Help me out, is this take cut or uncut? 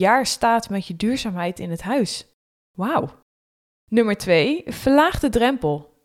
uncut